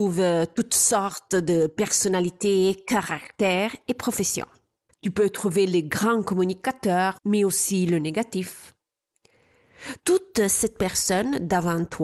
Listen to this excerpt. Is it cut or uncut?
cut